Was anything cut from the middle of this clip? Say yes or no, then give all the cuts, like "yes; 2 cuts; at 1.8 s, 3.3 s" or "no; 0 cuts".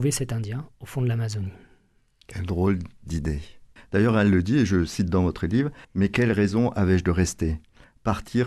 yes; 2 cuts; at 3.8 s, 5.8 s